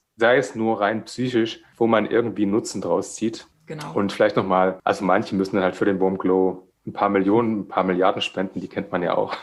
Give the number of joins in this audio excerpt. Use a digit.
0